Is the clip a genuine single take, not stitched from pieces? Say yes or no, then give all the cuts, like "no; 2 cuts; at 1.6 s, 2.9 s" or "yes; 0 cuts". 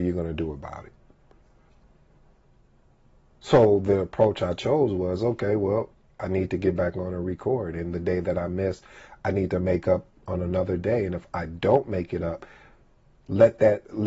yes; 0 cuts